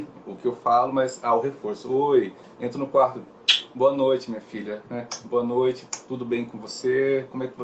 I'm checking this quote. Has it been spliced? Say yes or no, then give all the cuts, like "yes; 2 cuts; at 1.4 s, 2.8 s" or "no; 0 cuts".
no; 0 cuts